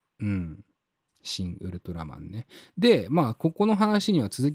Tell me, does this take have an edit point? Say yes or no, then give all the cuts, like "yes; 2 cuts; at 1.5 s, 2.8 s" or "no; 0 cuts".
no; 0 cuts